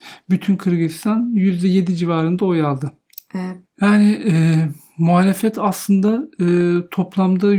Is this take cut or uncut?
cut